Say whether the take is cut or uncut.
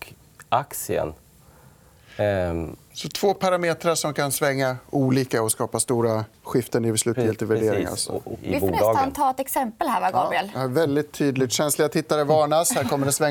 cut